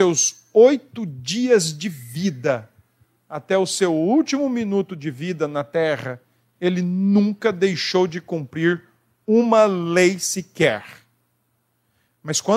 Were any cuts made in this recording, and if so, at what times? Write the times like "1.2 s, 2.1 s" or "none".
none